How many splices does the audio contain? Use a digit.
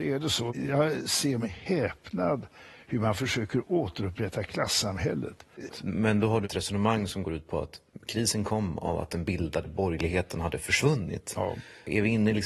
1